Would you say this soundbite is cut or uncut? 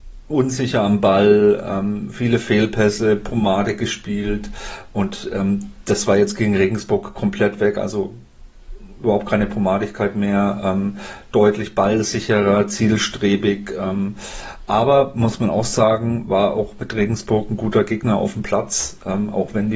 uncut